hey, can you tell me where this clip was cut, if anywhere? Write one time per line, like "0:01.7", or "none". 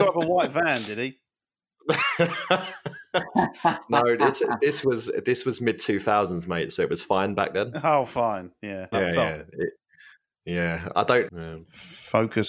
0:08.9
0:11.3

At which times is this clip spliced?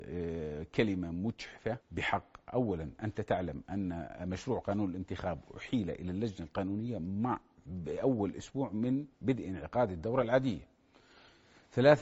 0:01.8
0:09.1

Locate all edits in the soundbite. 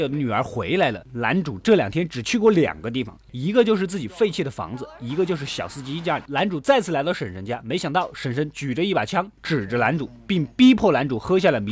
0:01.0

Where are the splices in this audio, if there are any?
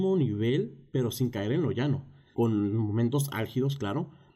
0:02.3

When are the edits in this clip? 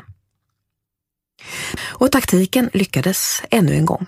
0:01.8

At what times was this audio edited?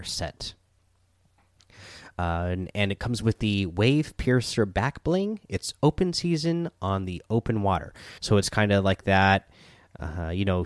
0:08.2

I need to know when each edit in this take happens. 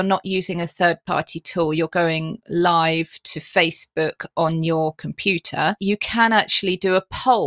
none

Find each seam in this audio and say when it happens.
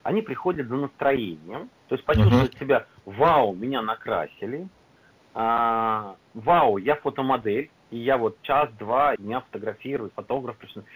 0:07.8
0:09.2

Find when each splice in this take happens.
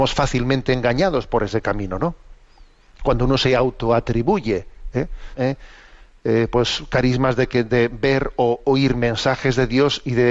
0:05.3

